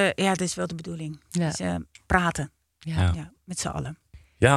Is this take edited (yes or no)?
no